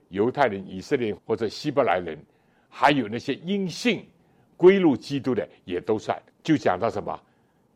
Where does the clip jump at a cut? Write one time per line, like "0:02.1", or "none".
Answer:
0:01.2
0:06.3